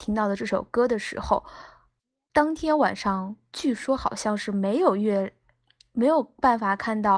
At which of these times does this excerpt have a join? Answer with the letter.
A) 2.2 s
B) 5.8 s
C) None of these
C